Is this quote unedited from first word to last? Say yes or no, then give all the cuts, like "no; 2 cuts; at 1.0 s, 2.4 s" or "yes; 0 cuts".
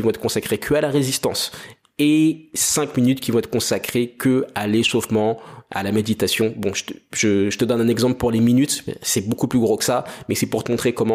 yes; 0 cuts